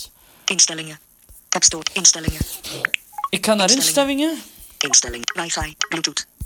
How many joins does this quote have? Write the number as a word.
one